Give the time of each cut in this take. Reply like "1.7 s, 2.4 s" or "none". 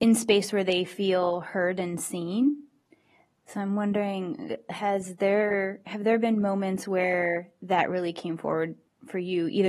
none